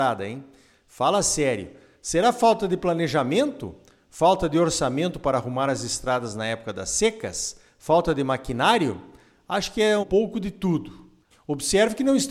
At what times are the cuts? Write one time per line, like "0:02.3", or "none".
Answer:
0:10.0
0:11.3